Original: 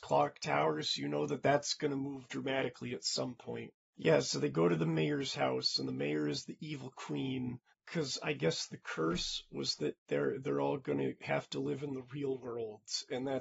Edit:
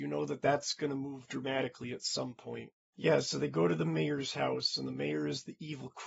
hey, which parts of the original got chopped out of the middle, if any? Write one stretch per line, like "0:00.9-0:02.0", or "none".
none